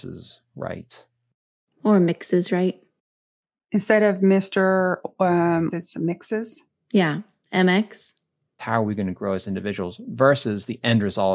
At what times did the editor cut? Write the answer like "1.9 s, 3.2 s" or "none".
5.7 s, 8.6 s